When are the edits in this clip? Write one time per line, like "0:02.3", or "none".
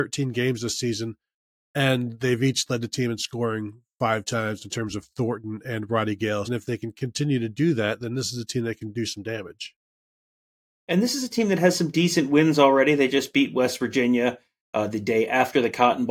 0:06.4